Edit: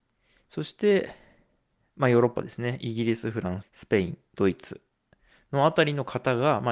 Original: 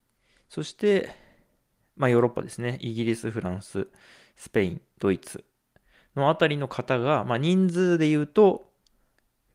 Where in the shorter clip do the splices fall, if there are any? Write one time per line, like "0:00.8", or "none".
0:03.6